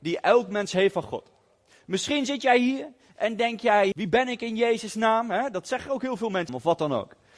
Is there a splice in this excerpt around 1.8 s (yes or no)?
no